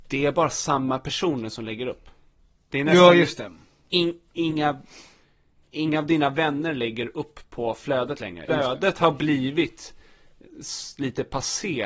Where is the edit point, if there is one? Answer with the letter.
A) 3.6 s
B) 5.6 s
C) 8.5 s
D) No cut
C